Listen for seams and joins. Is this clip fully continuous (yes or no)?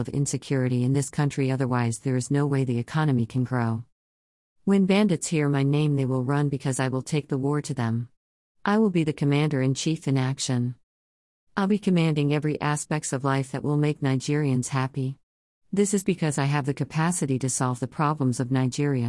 no